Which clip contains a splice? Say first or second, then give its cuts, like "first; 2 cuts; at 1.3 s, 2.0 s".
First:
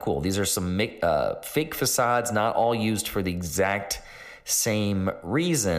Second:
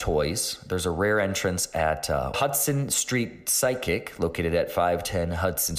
second; 1 cut; at 2.3 s